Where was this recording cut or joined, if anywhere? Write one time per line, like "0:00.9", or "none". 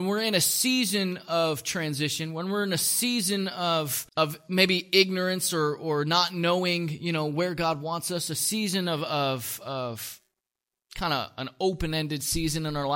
0:04.1